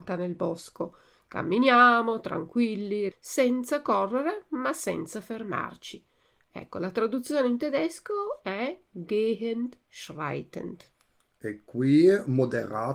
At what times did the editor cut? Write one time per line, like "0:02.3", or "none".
0:03.1